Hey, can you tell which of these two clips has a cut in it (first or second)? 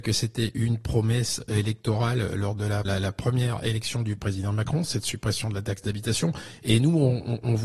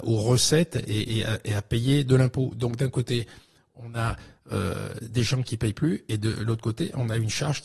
first